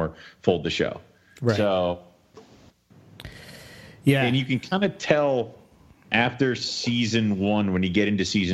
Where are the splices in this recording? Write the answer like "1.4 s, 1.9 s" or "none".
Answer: none